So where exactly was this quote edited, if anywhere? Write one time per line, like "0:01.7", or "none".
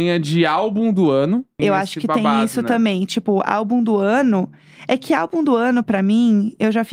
0:01.6